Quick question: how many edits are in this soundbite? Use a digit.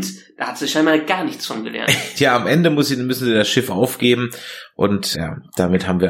2